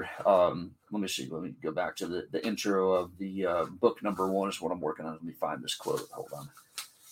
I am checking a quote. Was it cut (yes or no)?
no